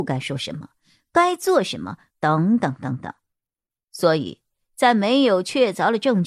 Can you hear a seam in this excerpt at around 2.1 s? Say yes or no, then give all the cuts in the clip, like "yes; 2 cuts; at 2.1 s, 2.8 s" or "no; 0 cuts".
yes; 1 cut; at 2.1 s